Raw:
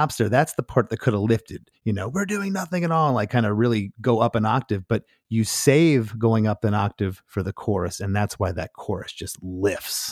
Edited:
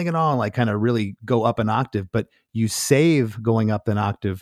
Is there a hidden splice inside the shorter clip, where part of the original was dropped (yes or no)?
no